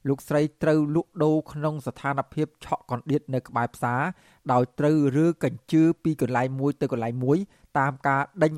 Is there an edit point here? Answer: no; 0 cuts

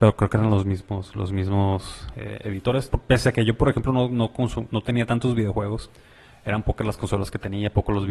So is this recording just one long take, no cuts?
no; 1 cut; at 2.9 s

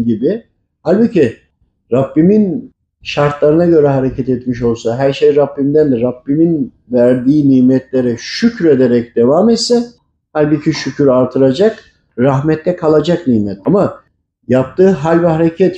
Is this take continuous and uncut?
yes; 0 cuts

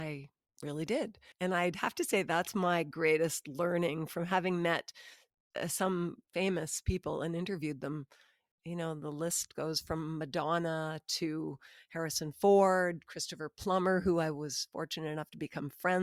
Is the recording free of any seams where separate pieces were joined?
no; 2 cuts; at 1.3 s, 6.2 s

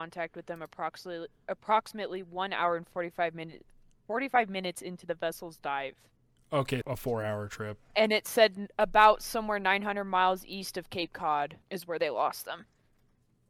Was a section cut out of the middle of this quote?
yes; 2 cuts; at 6.8 s, 11.6 s

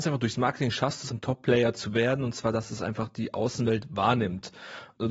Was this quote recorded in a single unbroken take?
no; 1 cut; at 1.1 s

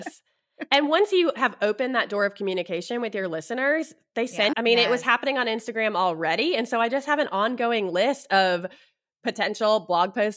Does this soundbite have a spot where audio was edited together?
yes; 1 cut; at 4.5 s

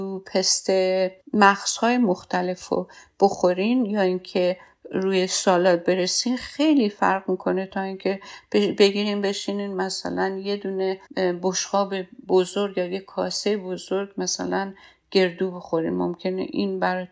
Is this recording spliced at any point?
yes; 2 cuts; at 1.2 s, 11.1 s

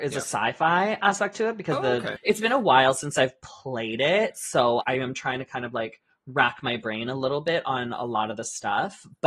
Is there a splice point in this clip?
yes; 2 cuts; at 2.2 s, 4.8 s

